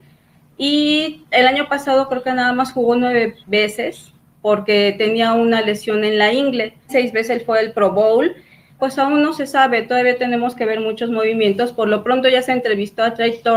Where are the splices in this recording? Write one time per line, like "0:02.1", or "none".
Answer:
0:03.4
0:06.9
0:08.8